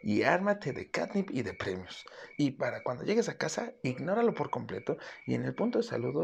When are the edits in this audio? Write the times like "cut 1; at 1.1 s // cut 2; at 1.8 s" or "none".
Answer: cut 1; at 2.4 s